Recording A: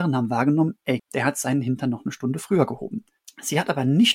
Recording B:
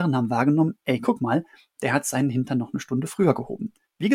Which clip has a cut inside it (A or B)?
A